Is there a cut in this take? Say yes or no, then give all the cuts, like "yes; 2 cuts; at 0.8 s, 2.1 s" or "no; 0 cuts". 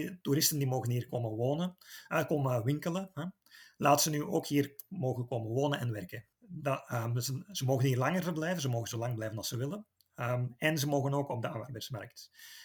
yes; 1 cut; at 6.3 s